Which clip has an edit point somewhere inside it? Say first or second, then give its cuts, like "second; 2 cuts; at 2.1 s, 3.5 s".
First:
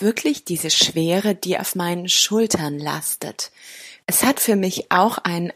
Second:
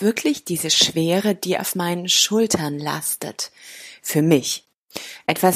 first; 1 cut; at 4.0 s